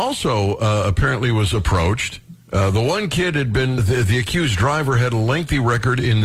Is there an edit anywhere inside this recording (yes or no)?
yes